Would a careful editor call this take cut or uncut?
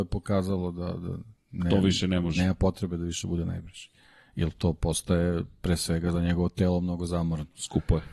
uncut